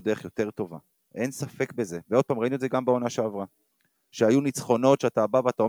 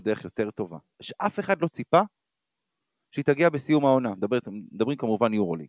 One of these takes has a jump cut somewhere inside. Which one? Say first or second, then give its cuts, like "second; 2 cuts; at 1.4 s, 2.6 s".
second; 1 cut; at 0.9 s